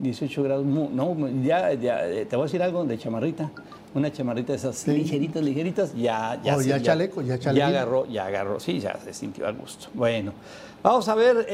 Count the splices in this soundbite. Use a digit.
0